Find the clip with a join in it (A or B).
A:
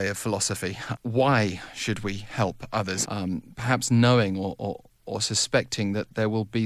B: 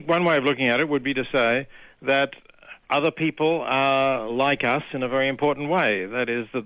A